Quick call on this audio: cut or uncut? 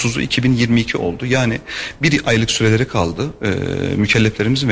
uncut